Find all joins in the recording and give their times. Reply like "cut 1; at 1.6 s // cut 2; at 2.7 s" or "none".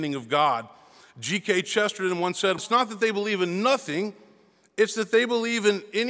cut 1; at 2.6 s